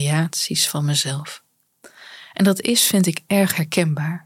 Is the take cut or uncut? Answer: uncut